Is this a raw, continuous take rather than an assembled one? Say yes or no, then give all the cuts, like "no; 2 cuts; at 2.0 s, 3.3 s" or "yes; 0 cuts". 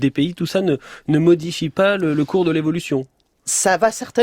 yes; 0 cuts